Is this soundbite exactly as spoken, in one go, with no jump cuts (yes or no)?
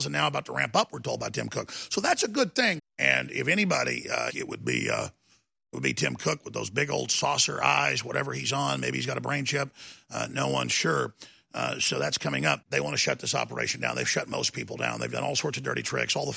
no